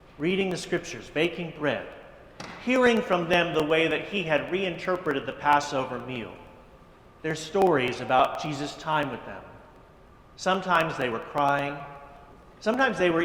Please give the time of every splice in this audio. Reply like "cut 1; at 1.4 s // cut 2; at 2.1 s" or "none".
none